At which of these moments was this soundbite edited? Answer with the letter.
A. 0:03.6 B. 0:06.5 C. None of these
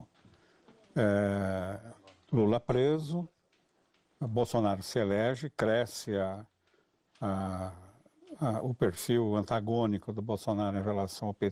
C